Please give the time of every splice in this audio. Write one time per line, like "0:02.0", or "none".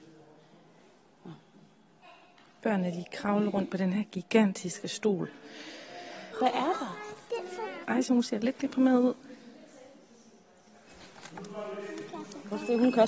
0:06.3
0:07.8